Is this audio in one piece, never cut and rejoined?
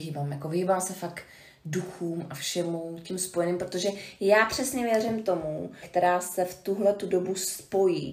no; 1 cut; at 5.8 s

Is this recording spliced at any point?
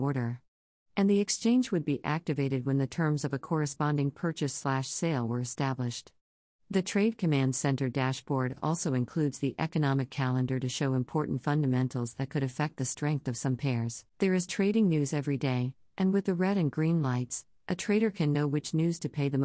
yes; 1 cut; at 14.1 s

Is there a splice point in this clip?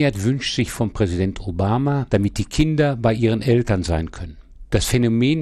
yes; 1 cut; at 2.1 s

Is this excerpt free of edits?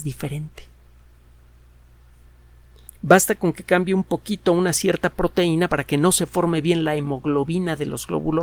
no; 2 cuts; at 2.9 s, 5.7 s

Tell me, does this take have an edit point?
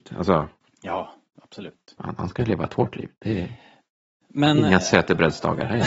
no; 0 cuts

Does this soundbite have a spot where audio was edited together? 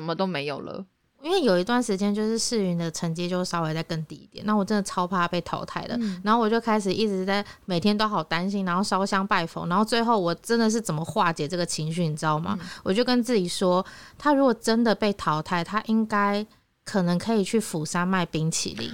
no; 0 cuts

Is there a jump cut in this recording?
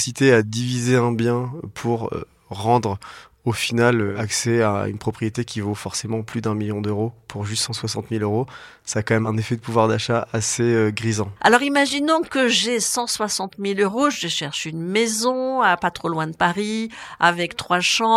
no; 0 cuts

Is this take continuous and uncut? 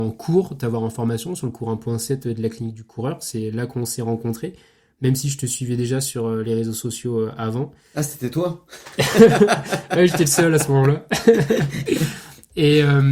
yes; 0 cuts

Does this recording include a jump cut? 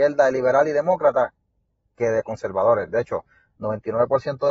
no; 0 cuts

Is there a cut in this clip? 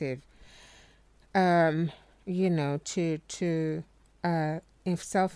no; 0 cuts

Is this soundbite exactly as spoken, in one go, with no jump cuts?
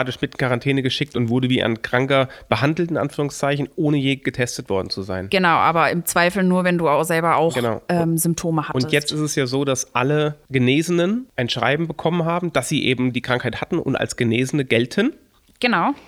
yes; 0 cuts

